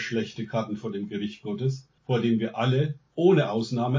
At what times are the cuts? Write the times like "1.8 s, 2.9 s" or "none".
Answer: 2.0 s